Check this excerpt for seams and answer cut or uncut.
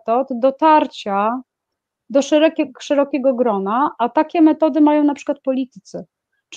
uncut